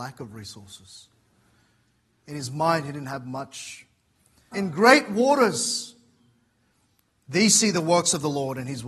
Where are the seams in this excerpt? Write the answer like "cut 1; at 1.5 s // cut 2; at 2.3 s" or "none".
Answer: cut 1; at 4.5 s